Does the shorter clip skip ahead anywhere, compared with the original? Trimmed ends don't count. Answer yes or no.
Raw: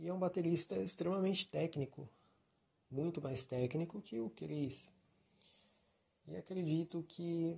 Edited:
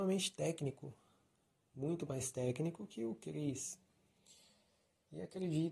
no